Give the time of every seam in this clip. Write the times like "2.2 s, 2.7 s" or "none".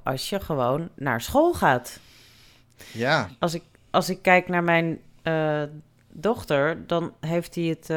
none

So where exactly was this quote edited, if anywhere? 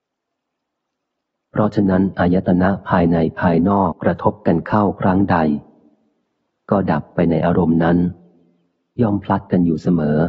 3.9 s

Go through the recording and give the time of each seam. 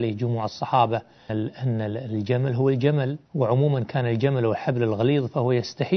1.3 s, 3.3 s

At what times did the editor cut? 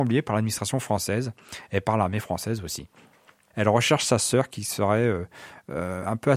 3.5 s

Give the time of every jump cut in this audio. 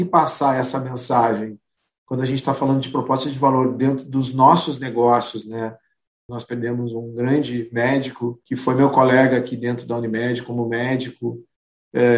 6.3 s, 8.4 s

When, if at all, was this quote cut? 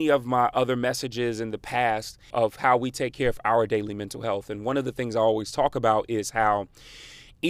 2.3 s

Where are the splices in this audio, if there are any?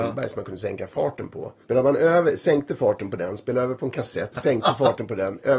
1.6 s, 4.3 s

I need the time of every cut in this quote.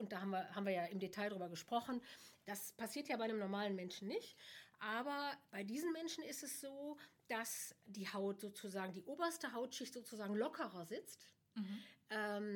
2.4 s

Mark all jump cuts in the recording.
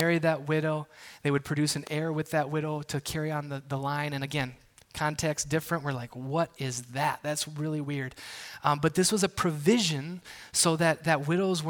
none

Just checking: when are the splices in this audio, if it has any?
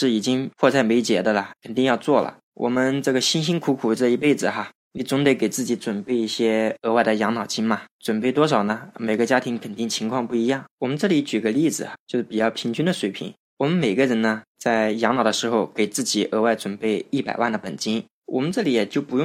none

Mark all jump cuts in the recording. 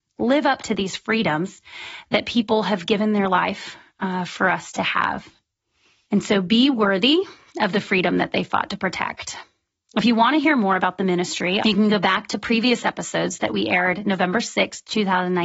11.6 s

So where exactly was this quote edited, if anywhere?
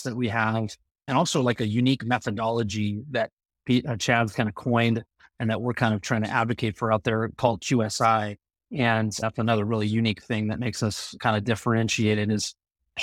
8.5 s

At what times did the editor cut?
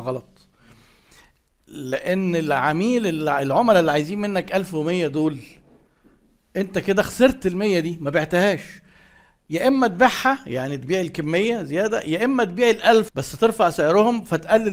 13.1 s

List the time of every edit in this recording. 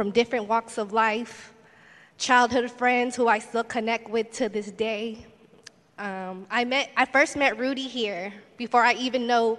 none

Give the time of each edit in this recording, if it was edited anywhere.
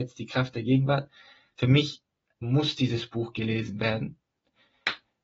2.4 s

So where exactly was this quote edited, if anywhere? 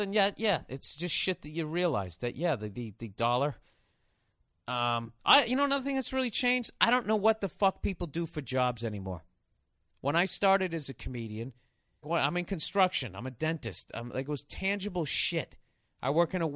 12.0 s

